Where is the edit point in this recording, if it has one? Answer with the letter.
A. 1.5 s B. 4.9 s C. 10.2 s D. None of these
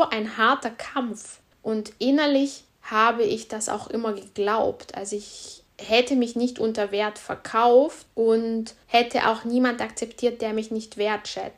A